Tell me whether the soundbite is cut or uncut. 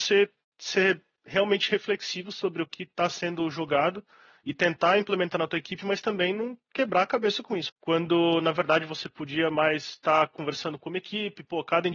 cut